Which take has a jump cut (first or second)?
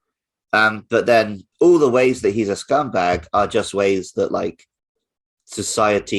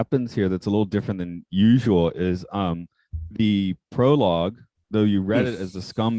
first